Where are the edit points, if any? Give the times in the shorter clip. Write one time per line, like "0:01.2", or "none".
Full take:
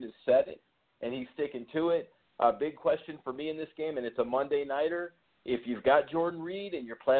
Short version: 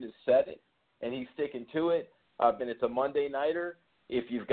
0:02.6